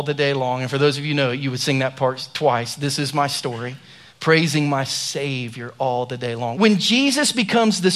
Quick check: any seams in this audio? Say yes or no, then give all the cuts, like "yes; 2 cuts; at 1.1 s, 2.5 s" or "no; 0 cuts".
yes; 2 cuts; at 4.1 s, 6.5 s